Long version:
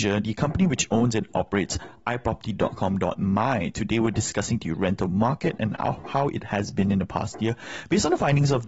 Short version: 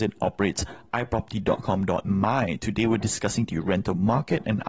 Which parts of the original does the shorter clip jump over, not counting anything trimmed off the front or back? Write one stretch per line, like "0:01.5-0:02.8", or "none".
none

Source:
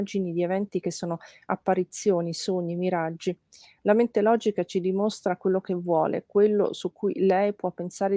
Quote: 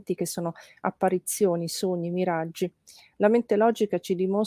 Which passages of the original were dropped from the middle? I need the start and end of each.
none

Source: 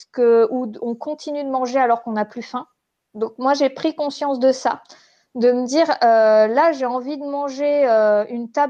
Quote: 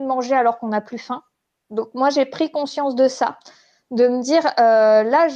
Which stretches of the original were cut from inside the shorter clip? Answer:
none

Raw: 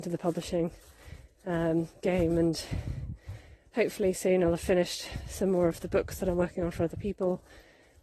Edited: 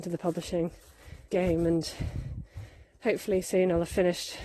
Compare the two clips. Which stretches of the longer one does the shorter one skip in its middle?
0:01.3-0:02.0

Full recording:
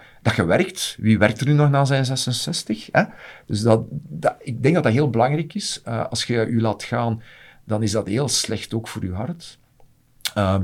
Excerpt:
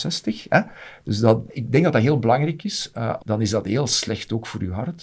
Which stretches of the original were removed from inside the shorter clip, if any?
0:03.9-0:04.4
0:06.1-0:07.6

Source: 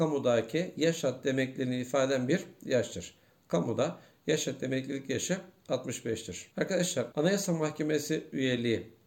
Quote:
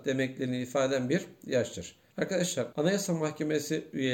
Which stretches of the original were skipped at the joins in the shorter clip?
0:03.3-0:06.5

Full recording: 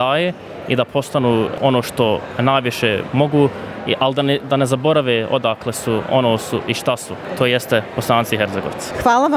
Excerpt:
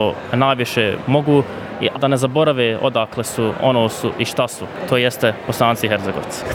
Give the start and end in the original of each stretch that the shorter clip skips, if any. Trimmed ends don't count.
0:04.0-0:04.4

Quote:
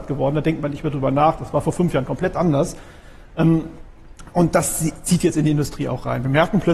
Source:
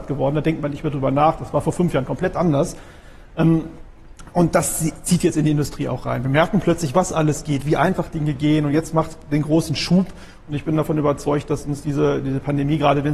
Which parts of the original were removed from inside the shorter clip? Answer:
none

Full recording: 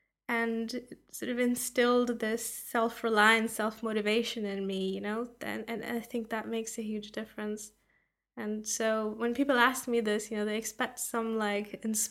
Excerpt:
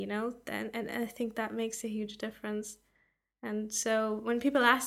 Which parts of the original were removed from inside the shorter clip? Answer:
none

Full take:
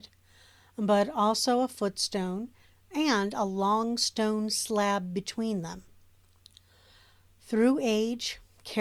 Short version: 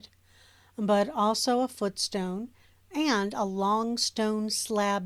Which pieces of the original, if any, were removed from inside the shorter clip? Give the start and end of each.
none

